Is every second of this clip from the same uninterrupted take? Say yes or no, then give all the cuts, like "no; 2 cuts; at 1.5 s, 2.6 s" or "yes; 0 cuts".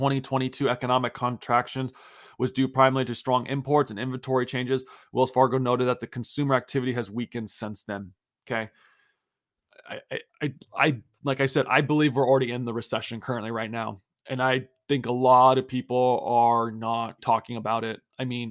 no; 1 cut; at 17.2 s